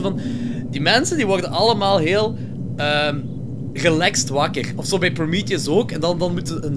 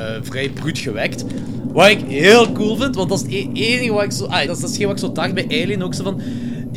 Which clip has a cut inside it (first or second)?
second